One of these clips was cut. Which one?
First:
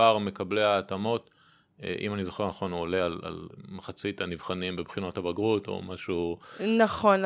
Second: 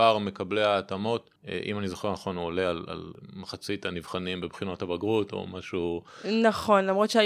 second; 1 cut; at 1.4 s

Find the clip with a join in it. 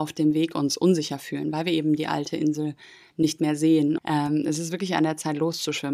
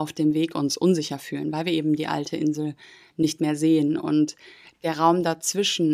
first; 1 cut; at 4.0 s

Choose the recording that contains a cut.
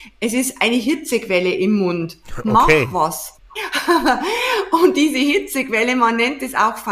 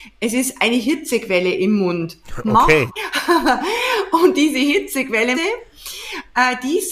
second; 2 cuts; at 2.9 s, 5.3 s

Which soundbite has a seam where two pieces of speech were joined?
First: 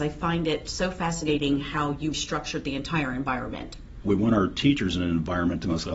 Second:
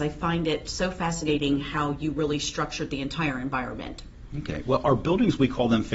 first; 2 cuts; at 2.1 s, 4.0 s

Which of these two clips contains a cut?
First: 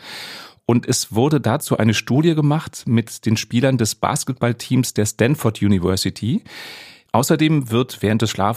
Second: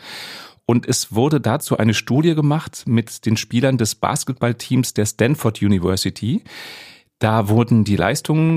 first; 1 cut; at 7.1 s

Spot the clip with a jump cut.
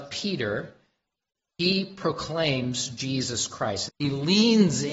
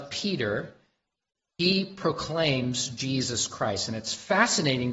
first; 1 cut; at 3.9 s

